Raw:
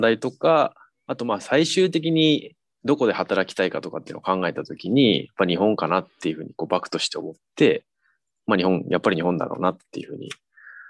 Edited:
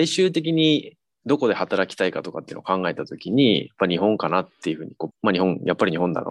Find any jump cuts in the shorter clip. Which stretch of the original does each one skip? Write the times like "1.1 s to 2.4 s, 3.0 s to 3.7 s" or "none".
6.7 s to 8.3 s